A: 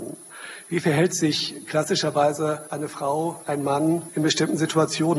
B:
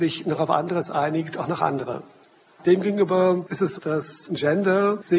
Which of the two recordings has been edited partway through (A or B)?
B